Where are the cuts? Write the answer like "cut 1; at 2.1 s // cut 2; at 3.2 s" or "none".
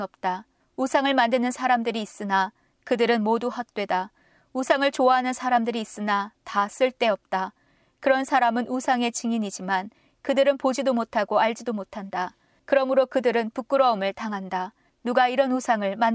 none